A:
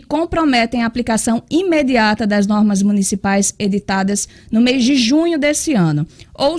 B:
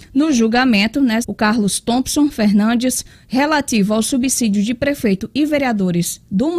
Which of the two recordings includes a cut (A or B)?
B